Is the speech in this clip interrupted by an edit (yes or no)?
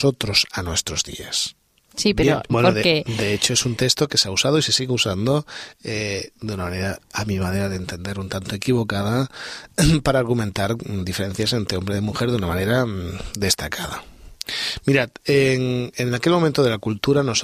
yes